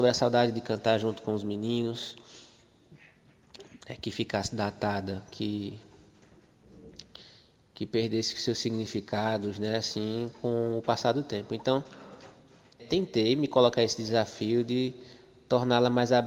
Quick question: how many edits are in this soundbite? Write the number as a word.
two